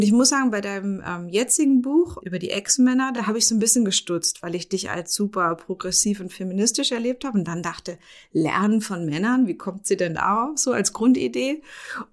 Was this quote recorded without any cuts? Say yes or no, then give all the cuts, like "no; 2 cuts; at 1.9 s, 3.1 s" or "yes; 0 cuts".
yes; 0 cuts